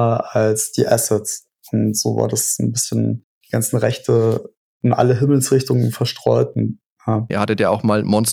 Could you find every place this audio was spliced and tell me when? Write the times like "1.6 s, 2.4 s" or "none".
7.3 s